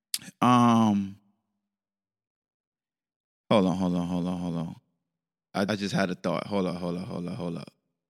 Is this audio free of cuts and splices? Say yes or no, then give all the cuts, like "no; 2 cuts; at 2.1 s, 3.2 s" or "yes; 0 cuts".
no; 1 cut; at 5.7 s